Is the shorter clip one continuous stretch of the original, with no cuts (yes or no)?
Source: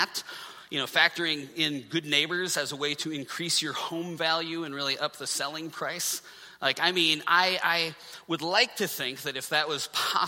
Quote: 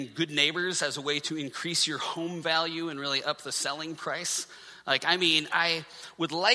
no